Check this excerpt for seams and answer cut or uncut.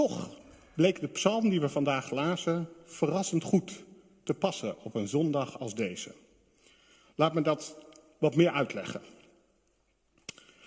uncut